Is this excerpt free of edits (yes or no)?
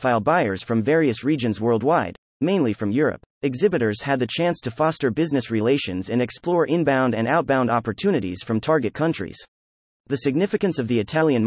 no